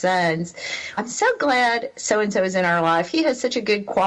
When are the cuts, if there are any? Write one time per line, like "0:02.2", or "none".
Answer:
0:01.0